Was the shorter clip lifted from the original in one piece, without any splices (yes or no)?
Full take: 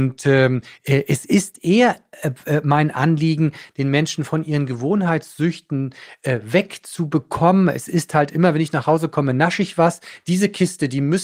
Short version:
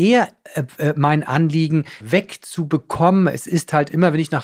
no